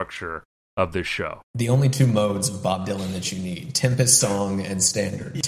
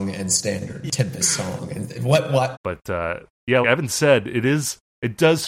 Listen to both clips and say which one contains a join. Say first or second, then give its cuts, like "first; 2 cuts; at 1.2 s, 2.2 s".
second; 2 cuts; at 2.5 s, 3.6 s